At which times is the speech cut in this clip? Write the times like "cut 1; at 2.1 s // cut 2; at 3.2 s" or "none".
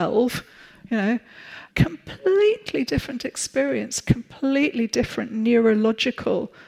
cut 1; at 1.7 s